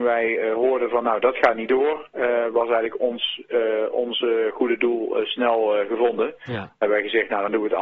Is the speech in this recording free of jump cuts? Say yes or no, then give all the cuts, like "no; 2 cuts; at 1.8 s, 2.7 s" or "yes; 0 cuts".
yes; 0 cuts